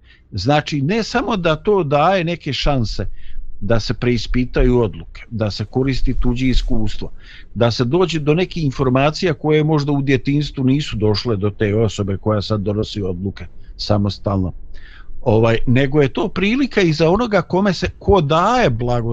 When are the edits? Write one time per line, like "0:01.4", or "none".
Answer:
none